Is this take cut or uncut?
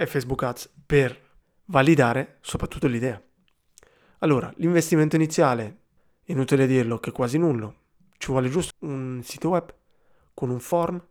cut